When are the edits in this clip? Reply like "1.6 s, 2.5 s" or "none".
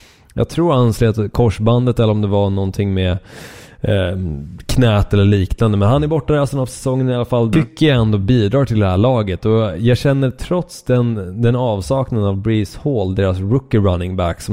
7.5 s